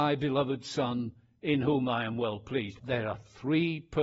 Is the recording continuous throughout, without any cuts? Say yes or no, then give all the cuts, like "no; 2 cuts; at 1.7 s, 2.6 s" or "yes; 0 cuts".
no; 1 cut; at 2.8 s